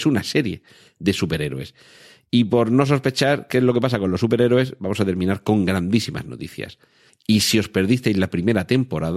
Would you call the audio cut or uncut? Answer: cut